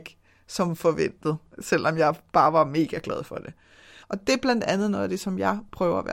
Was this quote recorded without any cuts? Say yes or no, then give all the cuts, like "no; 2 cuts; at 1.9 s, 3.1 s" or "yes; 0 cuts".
no; 1 cut; at 4.0 s